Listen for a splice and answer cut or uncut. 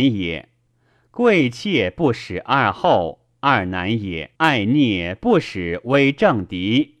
cut